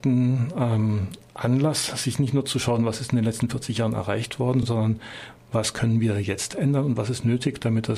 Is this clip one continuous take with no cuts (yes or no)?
yes